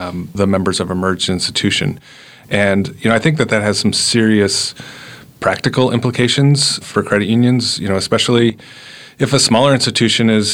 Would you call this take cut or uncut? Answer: cut